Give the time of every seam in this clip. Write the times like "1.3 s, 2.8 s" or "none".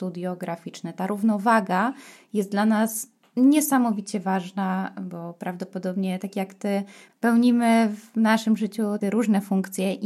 none

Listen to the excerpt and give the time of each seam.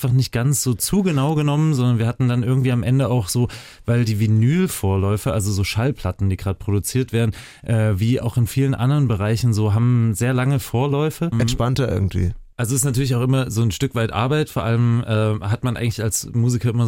11.3 s

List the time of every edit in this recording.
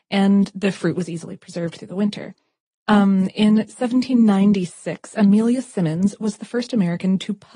2.7 s

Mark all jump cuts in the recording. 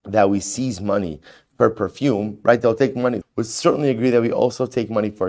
3.2 s

